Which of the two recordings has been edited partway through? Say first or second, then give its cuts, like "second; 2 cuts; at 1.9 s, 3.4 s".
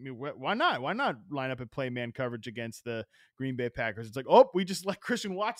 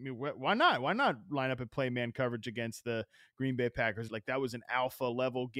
second; 1 cut; at 4.1 s